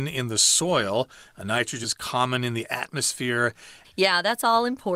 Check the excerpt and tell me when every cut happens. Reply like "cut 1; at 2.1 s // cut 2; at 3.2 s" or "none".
cut 1; at 1.8 s // cut 2; at 3.8 s